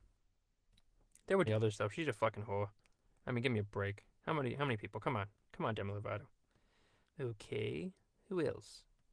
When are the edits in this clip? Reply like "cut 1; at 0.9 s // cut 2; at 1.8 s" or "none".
cut 1; at 1.5 s // cut 2; at 7.1 s

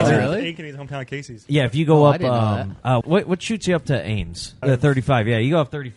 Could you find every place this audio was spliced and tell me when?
cut 1; at 3.0 s // cut 2; at 4.6 s

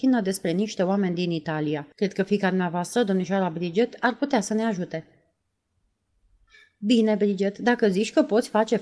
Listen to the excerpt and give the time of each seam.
cut 1; at 1.9 s

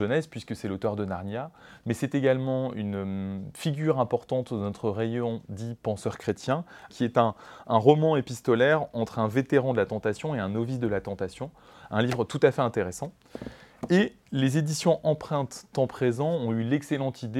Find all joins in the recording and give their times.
cut 1; at 6.9 s

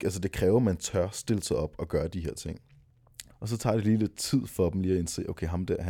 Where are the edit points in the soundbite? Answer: cut 1; at 3.3 s

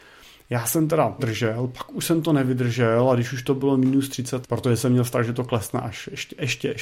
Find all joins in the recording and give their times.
cut 1; at 1.2 s // cut 2; at 4.4 s

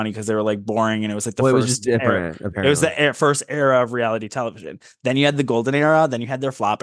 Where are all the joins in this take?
none

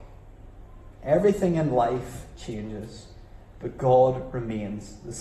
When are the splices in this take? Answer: none

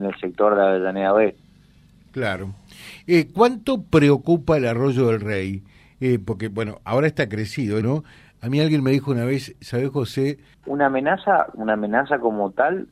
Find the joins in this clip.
cut 1; at 7.8 s // cut 2; at 10.5 s

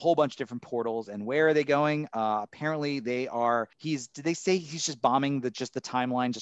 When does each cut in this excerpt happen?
cut 1; at 3.7 s

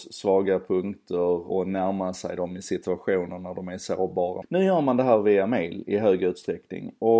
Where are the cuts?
cut 1; at 1.5 s // cut 2; at 4.4 s

